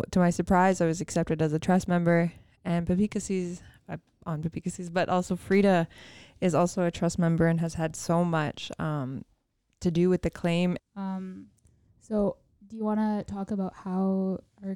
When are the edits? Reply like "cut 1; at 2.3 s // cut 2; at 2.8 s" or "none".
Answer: cut 1; at 10.8 s